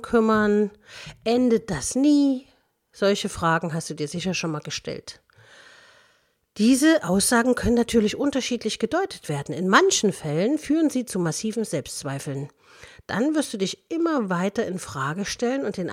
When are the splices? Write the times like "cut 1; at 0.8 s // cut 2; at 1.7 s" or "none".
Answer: none